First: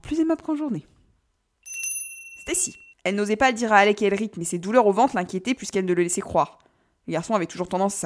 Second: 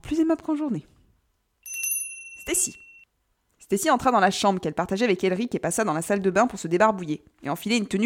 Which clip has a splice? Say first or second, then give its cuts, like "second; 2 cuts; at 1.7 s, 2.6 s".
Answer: first; 1 cut; at 2.9 s